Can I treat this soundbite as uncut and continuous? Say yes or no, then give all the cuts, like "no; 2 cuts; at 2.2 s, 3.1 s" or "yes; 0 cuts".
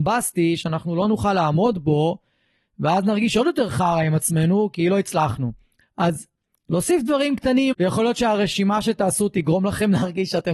no; 2 cuts; at 5.8 s, 7.7 s